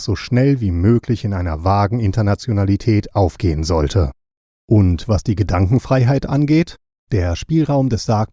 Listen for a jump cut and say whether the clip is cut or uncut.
uncut